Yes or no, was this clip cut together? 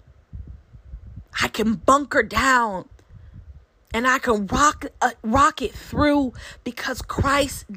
no